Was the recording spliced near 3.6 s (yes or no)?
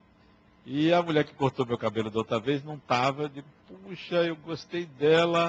no